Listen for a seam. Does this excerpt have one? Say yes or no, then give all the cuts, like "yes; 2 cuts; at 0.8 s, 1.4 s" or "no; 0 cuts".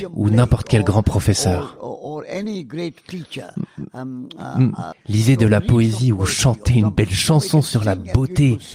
yes; 1 cut; at 4.9 s